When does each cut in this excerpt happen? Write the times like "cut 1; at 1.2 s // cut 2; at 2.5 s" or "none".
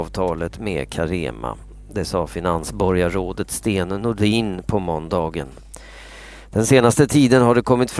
none